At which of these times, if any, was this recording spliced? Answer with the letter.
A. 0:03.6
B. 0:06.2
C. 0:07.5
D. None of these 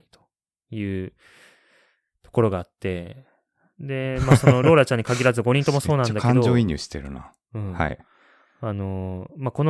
D